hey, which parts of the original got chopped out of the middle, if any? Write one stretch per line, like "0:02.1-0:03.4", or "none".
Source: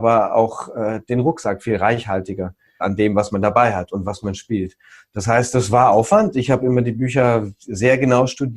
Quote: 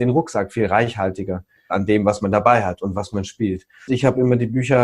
0:05.0-0:06.3